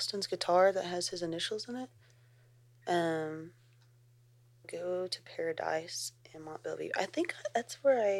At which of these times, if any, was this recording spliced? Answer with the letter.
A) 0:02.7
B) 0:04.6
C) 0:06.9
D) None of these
B